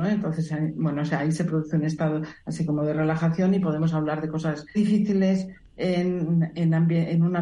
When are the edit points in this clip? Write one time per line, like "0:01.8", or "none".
0:04.7

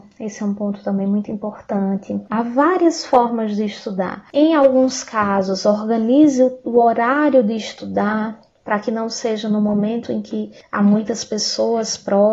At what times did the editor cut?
0:02.3
0:04.3

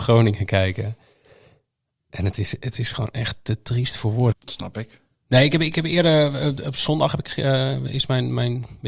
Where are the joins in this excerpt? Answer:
0:04.3

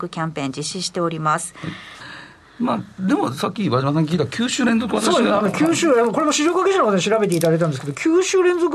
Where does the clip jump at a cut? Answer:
0:02.0

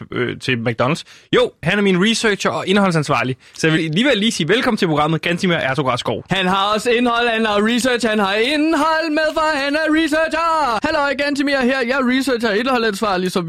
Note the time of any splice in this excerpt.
0:03.8
0:06.3
0:10.8

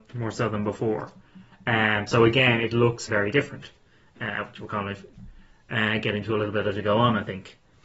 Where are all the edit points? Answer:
0:03.1

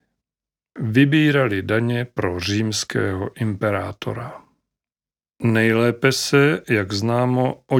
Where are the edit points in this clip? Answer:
none

